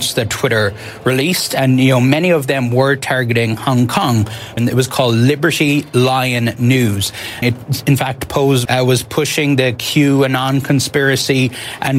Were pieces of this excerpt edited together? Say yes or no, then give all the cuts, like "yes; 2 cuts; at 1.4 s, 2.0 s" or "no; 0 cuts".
yes; 3 cuts; at 4.6 s, 7.4 s, 8.7 s